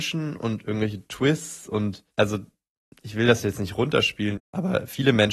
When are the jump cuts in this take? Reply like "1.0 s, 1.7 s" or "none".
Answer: 2.1 s, 4.4 s